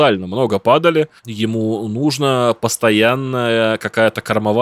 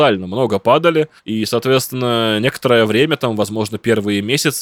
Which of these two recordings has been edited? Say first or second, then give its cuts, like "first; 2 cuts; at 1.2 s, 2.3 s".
first; 1 cut; at 1.2 s